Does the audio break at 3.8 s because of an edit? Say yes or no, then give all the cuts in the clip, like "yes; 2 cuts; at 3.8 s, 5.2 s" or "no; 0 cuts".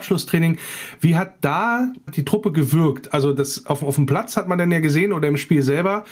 no; 1 cut; at 2.1 s